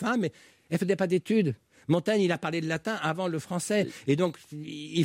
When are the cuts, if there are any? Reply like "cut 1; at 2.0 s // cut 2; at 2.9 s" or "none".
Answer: none